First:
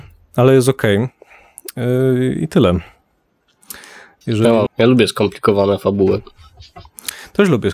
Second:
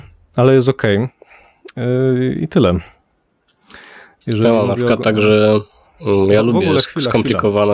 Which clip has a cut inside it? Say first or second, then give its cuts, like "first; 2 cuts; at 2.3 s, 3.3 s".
first; 1 cut; at 4.7 s